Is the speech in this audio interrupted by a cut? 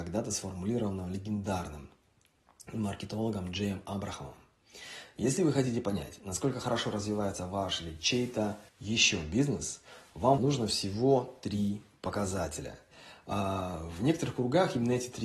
yes; 2 cuts; at 8.7 s, 10.4 s

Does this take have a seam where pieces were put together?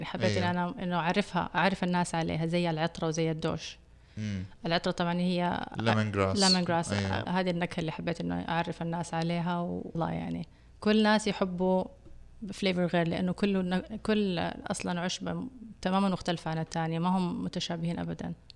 yes; 2 cuts; at 7.3 s, 9.9 s

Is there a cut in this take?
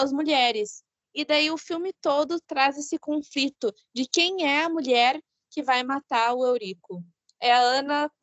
no; 0 cuts

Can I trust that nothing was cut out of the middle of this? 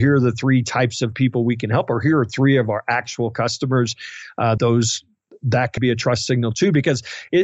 no; 2 cuts; at 4.6 s, 5.8 s

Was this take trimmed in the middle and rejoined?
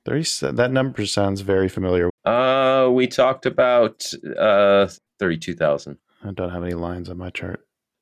yes; 2 cuts; at 2.1 s, 5.1 s

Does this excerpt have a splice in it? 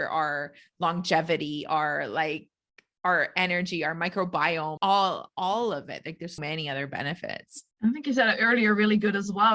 yes; 3 cuts; at 4.8 s, 6.4 s, 7.7 s

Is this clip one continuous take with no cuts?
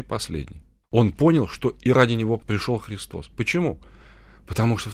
yes; 0 cuts

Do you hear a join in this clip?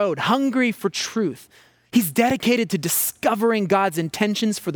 no; 0 cuts

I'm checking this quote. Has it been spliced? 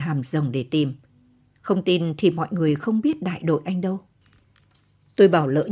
no; 0 cuts

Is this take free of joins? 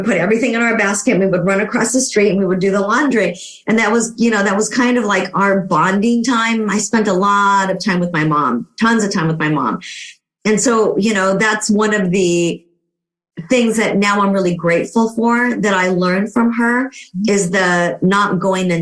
yes; 0 cuts

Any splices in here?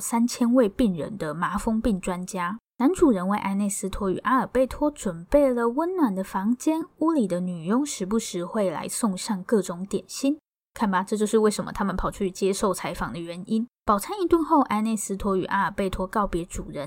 yes; 2 cuts; at 2.7 s, 13.8 s

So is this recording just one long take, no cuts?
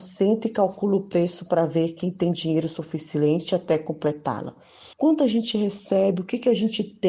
no; 1 cut; at 4.9 s

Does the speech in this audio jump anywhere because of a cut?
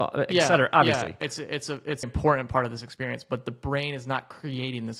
yes; 1 cut; at 2.0 s

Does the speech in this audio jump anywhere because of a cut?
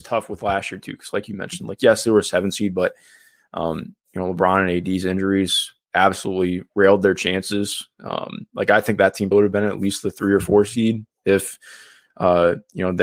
yes; 1 cut; at 9.3 s

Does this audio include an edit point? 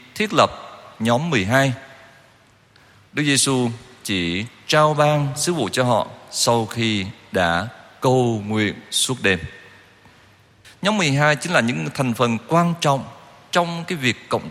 yes; 1 cut; at 10.6 s

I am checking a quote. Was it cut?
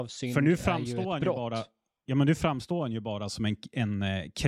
no; 0 cuts

